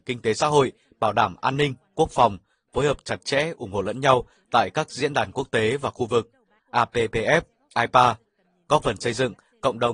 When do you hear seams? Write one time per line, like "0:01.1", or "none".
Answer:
0:06.6